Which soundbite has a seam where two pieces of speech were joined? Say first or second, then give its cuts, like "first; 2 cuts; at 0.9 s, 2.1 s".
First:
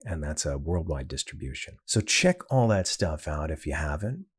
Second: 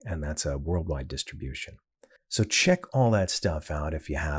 first; 1 cut; at 1.8 s